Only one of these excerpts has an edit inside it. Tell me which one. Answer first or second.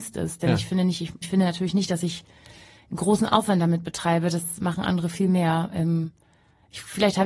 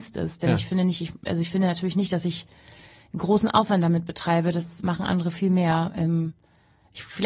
first